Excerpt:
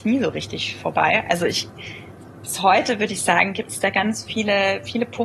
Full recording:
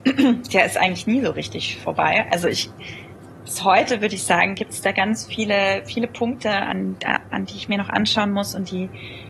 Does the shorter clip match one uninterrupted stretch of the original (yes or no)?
yes